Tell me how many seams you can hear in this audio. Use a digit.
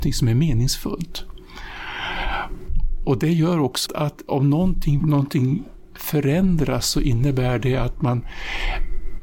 2